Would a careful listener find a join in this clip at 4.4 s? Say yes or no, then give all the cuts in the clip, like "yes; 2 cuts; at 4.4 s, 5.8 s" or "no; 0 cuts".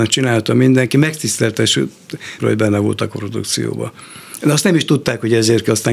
no; 1 cut; at 2.4 s